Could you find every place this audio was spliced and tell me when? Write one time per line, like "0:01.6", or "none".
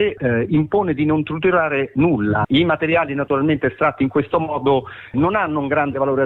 0:02.4
0:05.1